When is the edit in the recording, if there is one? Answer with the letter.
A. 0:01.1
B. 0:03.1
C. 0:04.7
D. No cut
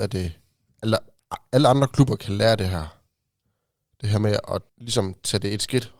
C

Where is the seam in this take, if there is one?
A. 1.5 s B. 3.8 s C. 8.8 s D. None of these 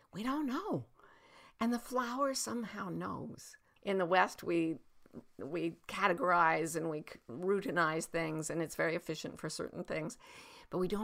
B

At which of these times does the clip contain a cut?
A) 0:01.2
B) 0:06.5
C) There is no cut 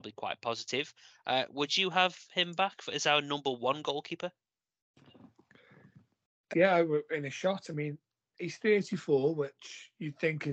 B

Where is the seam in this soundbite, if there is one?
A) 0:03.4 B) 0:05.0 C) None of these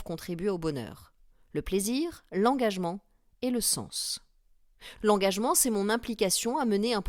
B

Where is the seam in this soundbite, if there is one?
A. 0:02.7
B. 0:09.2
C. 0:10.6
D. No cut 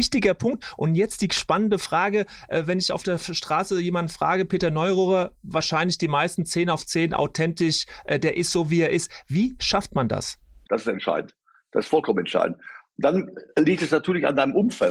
C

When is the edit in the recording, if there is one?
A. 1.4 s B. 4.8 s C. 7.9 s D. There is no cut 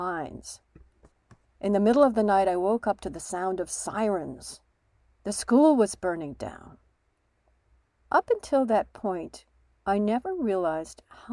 D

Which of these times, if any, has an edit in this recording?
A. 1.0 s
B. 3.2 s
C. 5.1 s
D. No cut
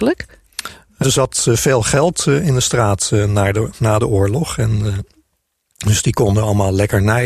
A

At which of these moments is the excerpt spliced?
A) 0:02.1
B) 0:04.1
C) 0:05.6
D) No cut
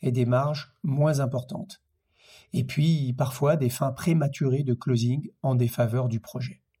D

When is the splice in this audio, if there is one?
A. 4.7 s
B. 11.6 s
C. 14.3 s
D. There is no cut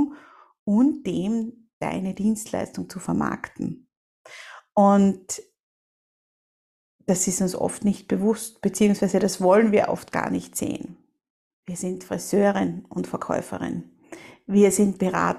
B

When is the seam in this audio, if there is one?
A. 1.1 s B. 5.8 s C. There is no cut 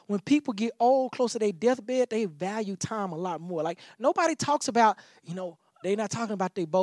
B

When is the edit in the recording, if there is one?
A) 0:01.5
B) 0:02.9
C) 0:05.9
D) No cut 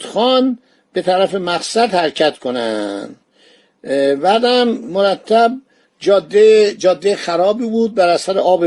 D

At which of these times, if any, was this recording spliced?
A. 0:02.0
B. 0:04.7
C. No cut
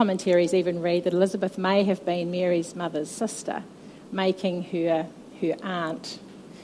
C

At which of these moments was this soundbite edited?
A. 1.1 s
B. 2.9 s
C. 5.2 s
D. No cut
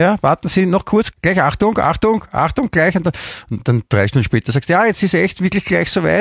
A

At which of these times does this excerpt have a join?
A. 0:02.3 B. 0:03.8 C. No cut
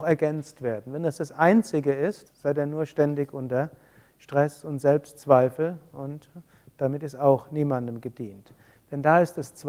A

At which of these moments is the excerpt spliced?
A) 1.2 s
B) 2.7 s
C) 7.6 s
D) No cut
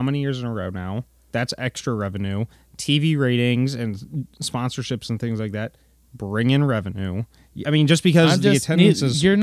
D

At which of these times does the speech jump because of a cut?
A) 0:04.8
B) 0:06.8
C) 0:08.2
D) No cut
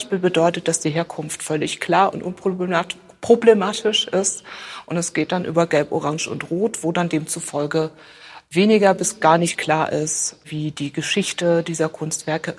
D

